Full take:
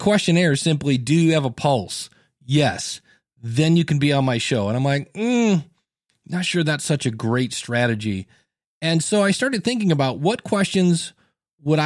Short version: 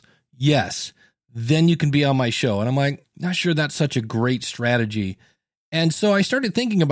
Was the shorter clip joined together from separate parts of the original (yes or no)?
yes